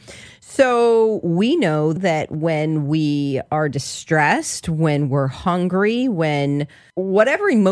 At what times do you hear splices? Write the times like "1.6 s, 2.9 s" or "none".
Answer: 2.0 s